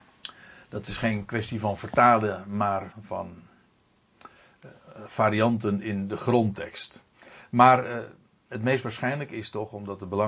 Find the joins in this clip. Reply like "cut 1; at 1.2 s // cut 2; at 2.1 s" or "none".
cut 1; at 2.9 s